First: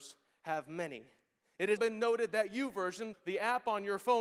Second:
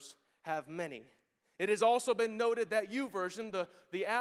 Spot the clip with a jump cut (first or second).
first